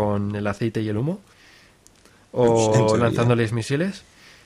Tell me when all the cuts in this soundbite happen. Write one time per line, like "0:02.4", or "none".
none